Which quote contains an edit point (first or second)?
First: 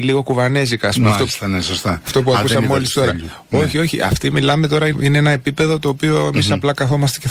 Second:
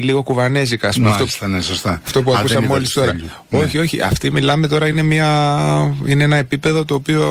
first